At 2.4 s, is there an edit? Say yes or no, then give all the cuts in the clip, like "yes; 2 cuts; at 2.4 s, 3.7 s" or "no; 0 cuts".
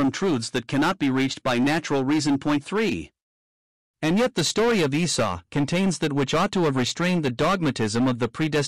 no; 1 cut; at 3.9 s